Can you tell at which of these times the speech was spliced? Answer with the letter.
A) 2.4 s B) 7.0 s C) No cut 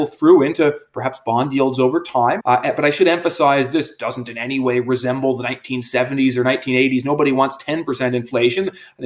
A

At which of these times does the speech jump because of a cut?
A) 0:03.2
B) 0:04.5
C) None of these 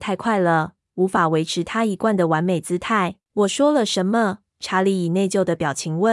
A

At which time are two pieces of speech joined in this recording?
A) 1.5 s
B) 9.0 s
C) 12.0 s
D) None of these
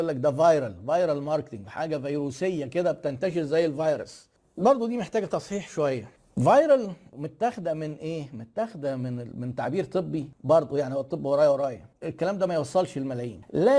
C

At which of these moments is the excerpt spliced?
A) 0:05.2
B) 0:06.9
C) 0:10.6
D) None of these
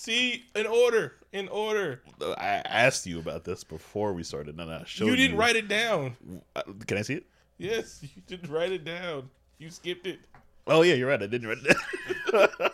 C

